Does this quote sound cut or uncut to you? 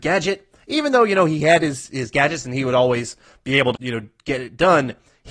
cut